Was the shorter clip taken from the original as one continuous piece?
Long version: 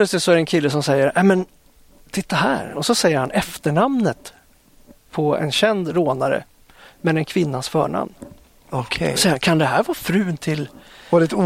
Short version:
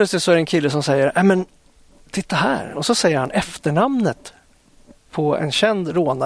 yes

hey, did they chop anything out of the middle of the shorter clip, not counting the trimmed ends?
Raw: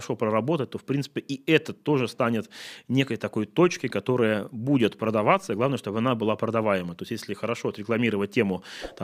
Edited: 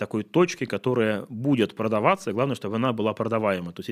no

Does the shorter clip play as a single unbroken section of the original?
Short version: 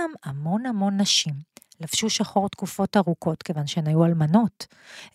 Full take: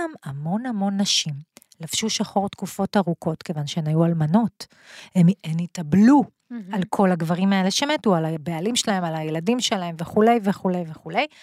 yes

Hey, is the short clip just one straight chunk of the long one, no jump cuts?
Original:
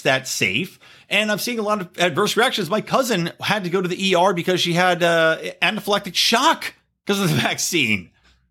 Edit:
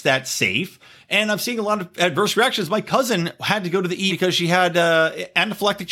no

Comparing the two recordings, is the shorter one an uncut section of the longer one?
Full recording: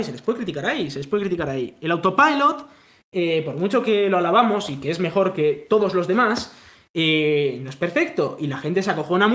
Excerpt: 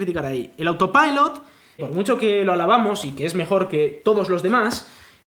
no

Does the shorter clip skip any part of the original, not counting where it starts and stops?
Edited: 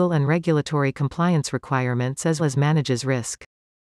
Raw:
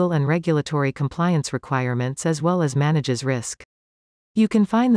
yes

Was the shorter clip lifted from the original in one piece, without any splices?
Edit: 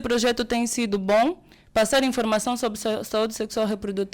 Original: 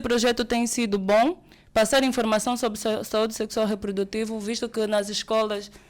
yes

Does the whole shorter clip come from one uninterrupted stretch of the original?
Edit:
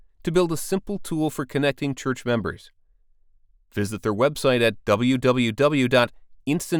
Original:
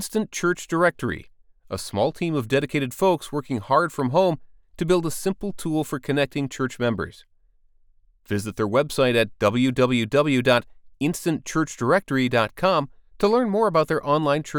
yes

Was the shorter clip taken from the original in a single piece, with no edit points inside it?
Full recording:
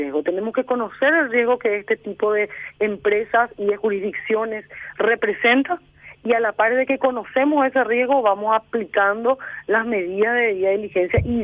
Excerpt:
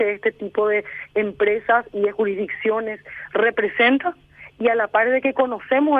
yes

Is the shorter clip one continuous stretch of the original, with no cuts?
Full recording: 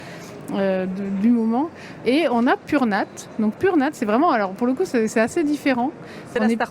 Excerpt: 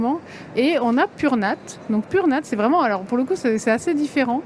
yes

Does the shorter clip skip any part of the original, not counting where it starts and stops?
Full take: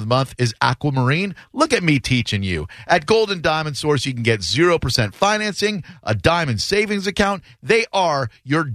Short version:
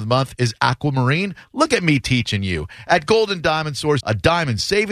yes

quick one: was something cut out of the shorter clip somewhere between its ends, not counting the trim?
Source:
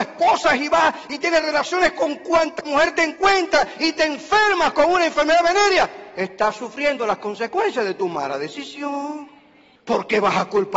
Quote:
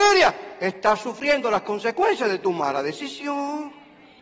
no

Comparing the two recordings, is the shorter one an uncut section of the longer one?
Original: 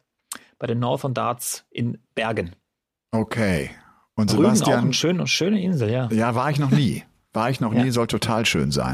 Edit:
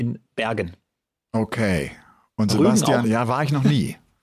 no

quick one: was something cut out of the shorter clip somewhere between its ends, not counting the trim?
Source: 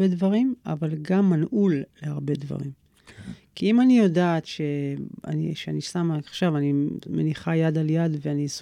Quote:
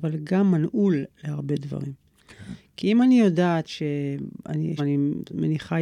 yes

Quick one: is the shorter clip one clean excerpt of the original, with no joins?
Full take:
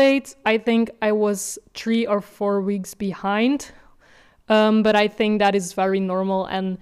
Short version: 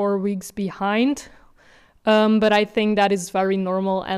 yes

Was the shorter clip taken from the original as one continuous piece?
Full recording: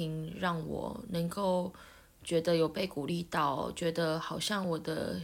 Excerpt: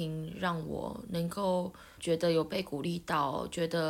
no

